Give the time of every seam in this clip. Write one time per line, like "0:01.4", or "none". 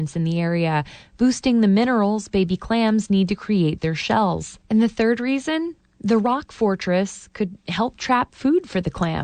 0:04.6